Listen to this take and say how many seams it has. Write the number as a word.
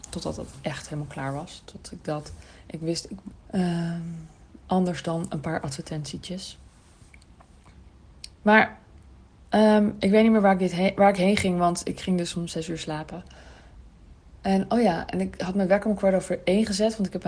one